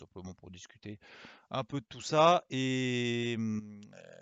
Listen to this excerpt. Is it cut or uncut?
uncut